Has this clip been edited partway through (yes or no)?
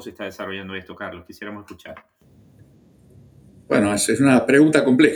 no